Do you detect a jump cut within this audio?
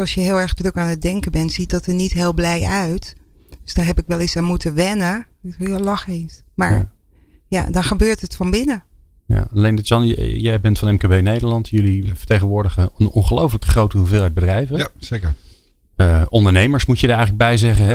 no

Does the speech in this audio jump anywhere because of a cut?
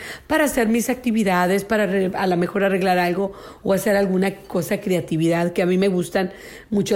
no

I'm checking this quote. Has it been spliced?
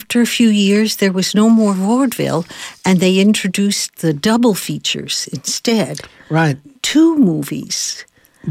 no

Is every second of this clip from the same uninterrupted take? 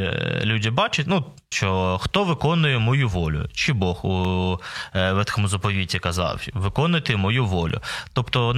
no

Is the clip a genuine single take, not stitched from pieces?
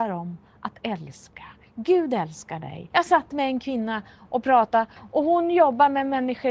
no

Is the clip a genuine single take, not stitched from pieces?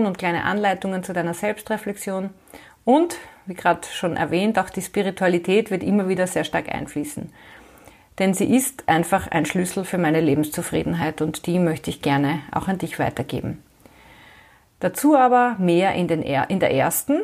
yes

